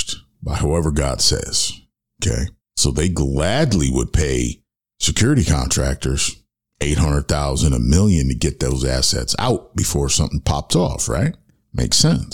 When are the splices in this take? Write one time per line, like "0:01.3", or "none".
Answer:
0:02.6